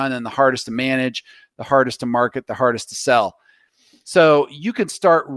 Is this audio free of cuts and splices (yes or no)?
yes